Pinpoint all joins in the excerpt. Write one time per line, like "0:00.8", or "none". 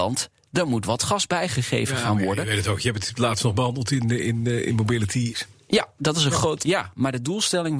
0:05.3
0:06.6